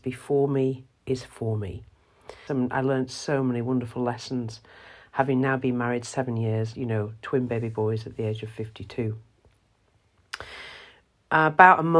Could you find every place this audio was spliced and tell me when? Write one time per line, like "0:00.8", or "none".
0:02.5
0:06.7